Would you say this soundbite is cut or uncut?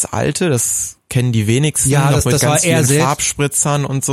uncut